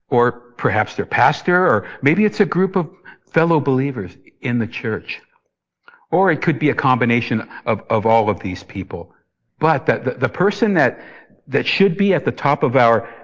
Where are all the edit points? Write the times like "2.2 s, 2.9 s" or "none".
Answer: 9.5 s